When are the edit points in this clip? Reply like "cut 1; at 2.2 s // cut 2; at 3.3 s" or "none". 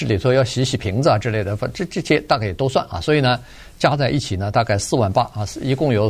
none